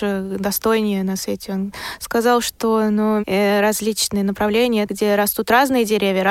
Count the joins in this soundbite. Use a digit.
2